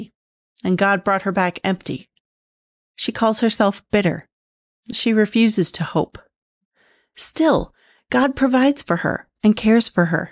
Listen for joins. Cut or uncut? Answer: uncut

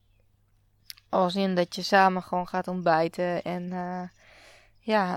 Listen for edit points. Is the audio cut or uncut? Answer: uncut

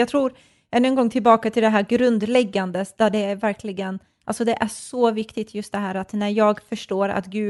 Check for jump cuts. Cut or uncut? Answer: uncut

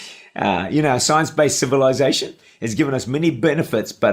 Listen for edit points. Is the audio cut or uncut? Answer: uncut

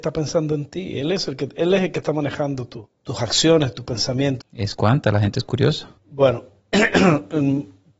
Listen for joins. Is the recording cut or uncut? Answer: cut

